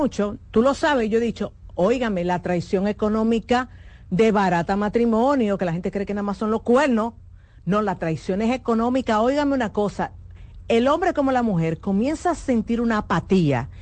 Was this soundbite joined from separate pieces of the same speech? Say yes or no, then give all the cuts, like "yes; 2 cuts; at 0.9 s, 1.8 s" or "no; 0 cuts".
no; 0 cuts